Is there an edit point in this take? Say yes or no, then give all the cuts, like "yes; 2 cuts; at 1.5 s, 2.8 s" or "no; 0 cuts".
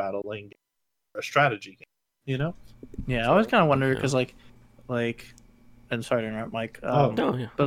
yes; 2 cuts; at 4.8 s, 6.0 s